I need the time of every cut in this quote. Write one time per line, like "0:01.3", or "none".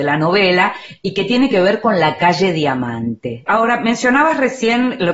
0:03.5